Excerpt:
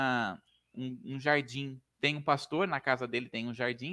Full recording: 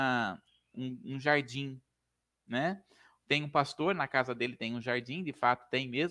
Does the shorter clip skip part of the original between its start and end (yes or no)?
yes